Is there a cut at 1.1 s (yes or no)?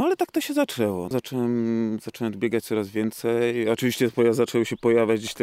yes